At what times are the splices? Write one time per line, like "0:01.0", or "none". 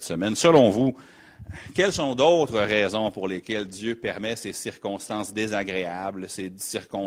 none